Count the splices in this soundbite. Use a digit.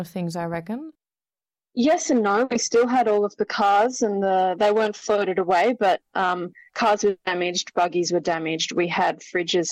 0